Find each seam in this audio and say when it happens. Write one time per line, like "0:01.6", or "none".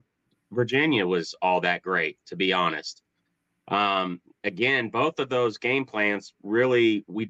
none